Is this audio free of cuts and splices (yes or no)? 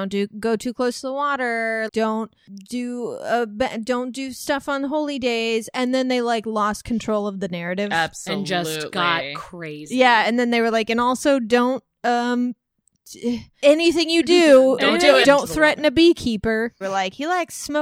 no